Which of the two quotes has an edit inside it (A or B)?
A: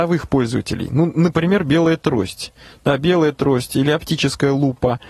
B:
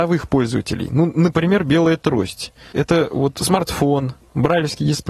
B